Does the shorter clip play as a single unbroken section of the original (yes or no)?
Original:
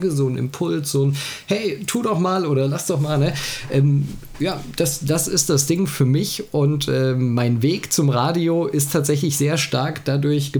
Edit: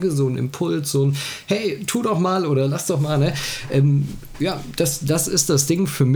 yes